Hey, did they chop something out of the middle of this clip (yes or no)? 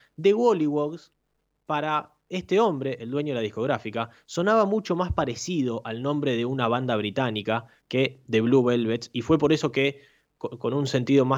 no